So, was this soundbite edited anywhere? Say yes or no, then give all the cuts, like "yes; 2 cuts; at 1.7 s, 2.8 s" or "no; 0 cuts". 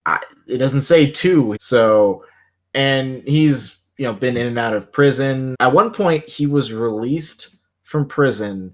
yes; 2 cuts; at 1.6 s, 5.5 s